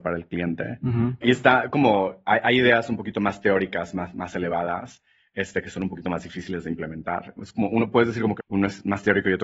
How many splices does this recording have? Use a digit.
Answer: 3